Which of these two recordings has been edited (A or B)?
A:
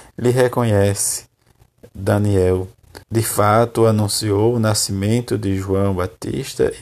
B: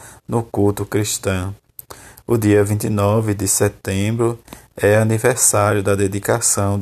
A